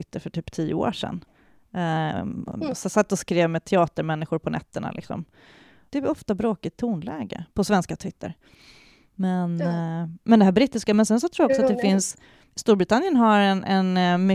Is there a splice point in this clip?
yes; 1 cut; at 5.9 s

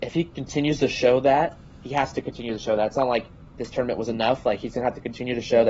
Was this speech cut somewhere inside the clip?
no; 0 cuts

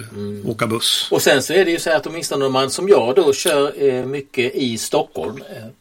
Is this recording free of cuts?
yes; 0 cuts

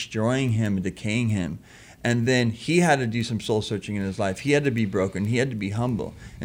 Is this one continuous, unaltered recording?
yes; 0 cuts

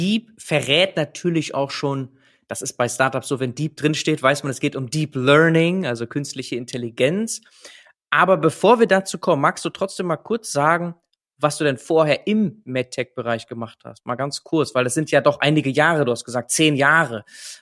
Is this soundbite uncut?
yes; 0 cuts

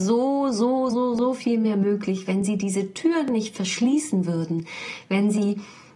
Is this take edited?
yes; 1 cut; at 0.9 s

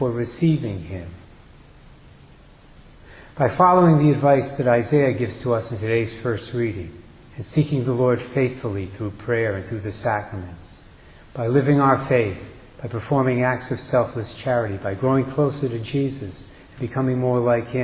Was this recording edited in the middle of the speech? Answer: no; 0 cuts

